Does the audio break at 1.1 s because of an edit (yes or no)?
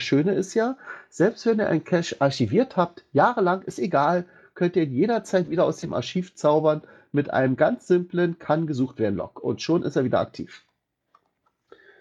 no